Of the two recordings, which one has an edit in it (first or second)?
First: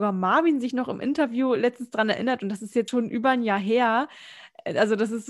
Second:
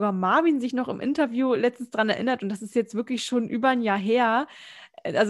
first